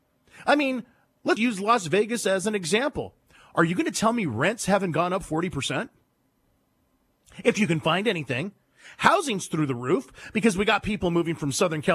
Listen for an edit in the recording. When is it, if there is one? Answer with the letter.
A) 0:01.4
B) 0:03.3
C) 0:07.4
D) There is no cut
A